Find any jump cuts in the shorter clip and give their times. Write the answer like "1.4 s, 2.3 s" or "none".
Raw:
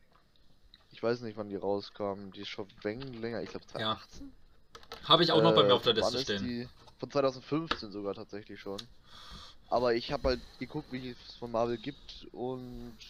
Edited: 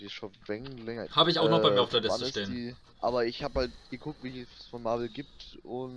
1.1 s, 2.9 s